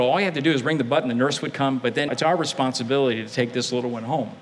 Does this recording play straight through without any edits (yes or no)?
no